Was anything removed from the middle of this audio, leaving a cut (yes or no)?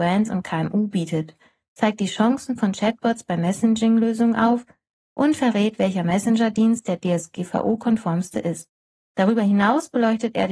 no